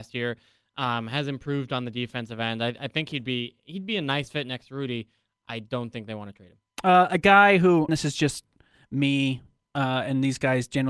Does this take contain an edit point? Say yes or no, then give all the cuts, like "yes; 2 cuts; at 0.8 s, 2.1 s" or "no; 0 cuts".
yes; 1 cut; at 7.9 s